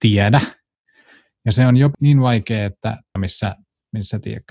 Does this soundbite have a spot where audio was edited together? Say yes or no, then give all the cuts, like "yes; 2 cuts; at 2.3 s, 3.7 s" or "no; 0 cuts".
yes; 2 cuts; at 1.9 s, 3.2 s